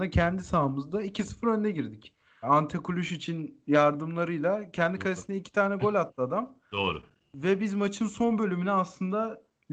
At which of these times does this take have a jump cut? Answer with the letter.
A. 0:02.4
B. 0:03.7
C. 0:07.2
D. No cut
A